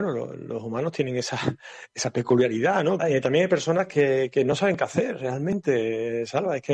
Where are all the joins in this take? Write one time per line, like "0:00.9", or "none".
0:03.0